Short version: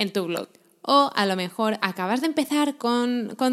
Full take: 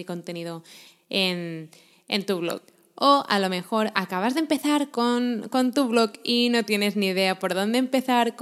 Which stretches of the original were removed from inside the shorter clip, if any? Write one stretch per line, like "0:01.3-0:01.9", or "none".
none

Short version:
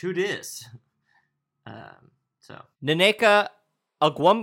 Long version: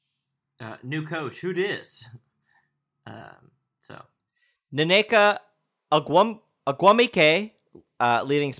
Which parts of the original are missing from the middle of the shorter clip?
0:04.1-0:04.6

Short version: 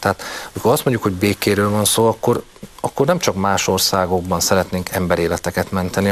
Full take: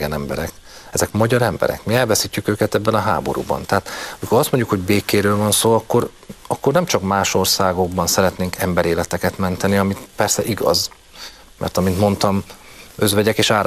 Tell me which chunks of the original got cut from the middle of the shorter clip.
none

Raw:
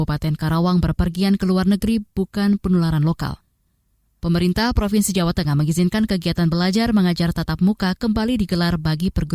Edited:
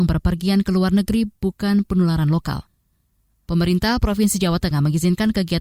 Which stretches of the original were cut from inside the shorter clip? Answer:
none

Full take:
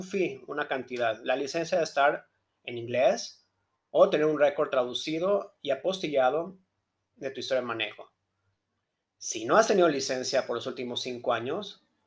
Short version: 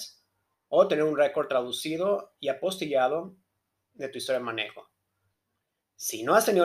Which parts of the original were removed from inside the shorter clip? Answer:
none

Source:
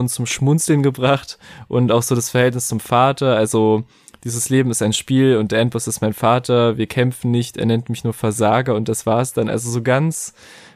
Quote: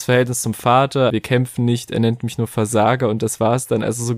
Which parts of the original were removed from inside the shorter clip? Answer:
0:03.4-0:06.8

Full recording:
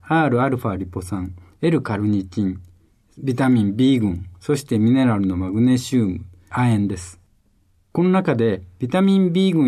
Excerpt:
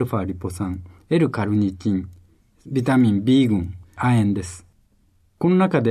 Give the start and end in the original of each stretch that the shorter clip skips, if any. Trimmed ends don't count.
0:04.3-0:06.4

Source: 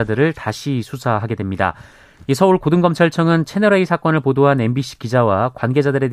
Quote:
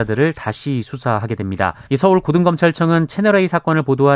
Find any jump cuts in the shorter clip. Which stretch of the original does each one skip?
0:01.9-0:02.2

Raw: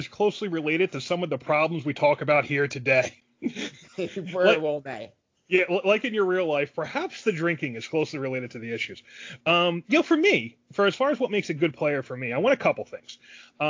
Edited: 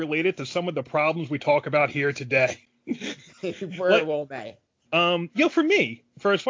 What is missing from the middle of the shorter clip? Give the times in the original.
0:05.4-0:09.4

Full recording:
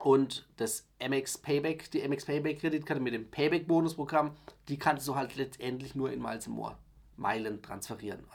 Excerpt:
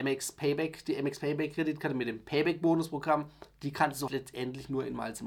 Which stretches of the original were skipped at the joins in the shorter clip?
0:05.1-0:05.3

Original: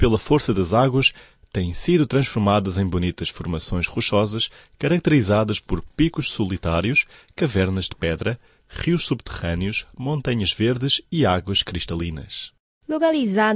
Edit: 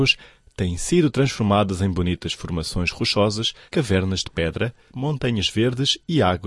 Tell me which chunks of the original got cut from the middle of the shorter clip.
0:04.6-0:07.3
0:08.5-0:09.9

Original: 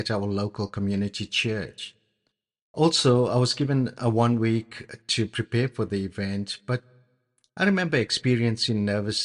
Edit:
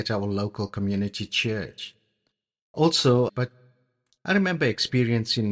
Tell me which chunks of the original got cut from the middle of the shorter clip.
0:03.3-0:06.6

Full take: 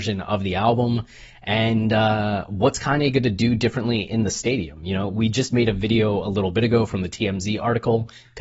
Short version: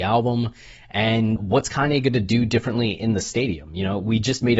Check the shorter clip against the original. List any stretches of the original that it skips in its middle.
0:01.9-0:02.5

